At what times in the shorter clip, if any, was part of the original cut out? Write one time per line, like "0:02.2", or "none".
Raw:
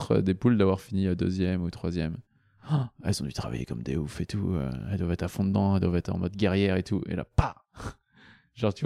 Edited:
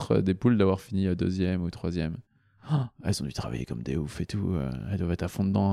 none